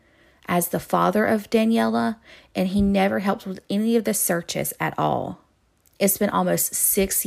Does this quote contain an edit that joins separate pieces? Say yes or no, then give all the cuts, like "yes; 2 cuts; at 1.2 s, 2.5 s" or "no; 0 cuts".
yes; 1 cut; at 5.8 s